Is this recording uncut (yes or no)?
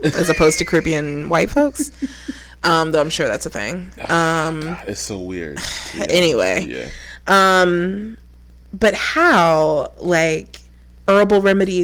yes